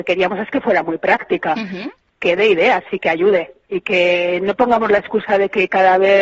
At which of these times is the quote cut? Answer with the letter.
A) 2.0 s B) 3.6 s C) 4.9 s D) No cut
B